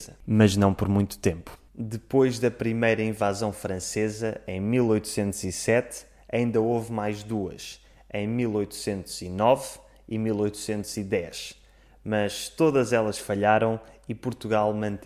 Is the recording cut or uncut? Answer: uncut